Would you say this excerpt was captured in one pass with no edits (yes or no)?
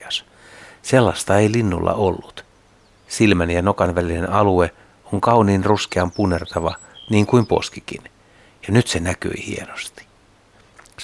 yes